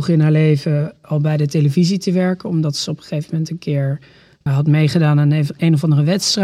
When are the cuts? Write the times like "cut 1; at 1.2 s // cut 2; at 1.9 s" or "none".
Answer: cut 1; at 4.5 s